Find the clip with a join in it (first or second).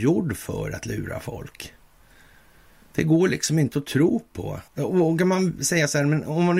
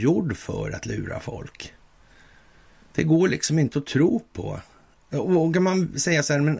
first